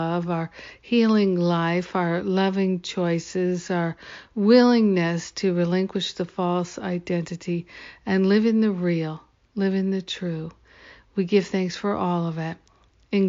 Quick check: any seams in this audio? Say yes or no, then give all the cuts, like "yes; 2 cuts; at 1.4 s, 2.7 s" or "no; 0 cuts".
no; 0 cuts